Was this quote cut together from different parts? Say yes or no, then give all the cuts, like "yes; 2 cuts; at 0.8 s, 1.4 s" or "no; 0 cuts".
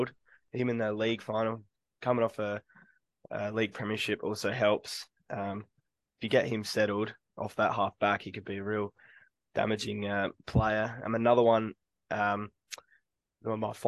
no; 0 cuts